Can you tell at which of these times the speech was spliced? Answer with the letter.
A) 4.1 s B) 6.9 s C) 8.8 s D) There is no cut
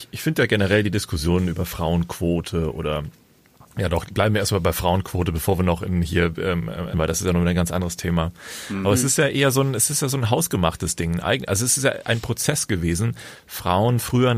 B